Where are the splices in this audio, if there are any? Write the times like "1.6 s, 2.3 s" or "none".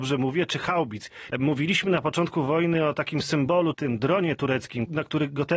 1.3 s, 3.7 s